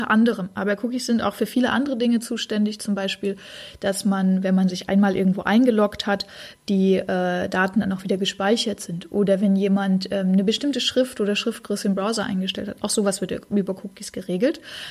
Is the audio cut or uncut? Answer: uncut